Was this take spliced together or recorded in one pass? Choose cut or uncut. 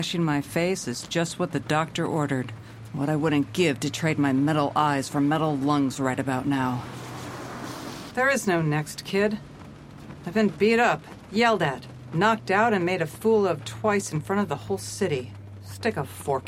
cut